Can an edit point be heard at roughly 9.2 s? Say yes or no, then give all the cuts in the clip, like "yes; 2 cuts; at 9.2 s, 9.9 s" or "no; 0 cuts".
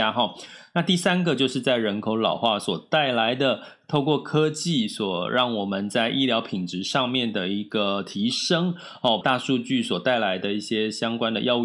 yes; 1 cut; at 9.2 s